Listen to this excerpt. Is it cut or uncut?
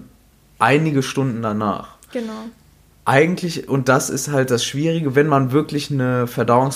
uncut